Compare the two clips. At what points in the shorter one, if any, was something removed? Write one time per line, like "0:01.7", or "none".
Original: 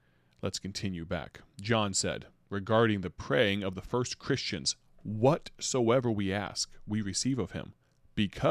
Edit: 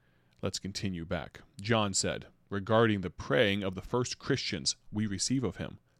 0:04.9